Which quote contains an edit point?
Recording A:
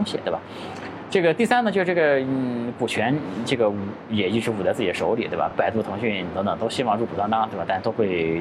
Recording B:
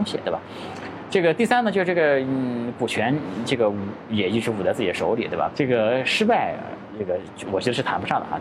B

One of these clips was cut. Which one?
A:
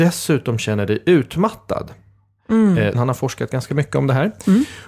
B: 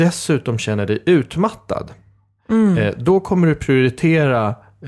A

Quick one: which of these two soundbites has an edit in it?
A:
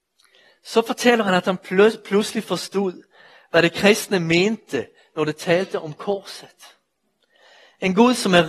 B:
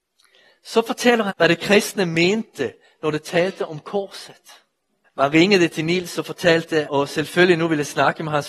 B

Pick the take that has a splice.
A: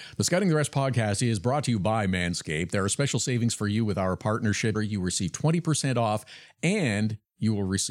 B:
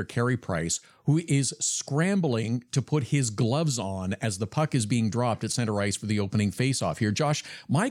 A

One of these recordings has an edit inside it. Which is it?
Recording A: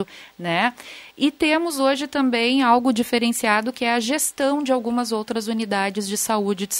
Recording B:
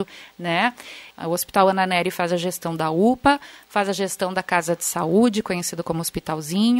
B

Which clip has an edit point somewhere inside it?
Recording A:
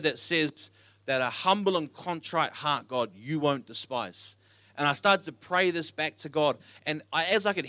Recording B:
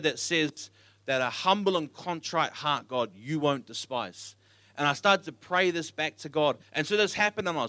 B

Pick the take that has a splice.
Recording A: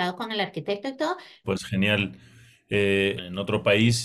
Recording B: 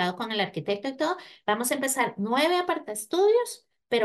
A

